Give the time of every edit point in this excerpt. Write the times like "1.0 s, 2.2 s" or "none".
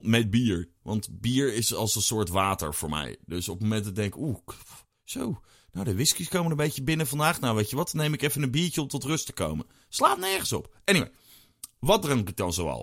none